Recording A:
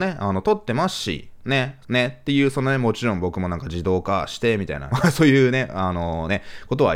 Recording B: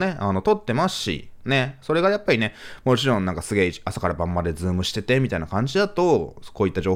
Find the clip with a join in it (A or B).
A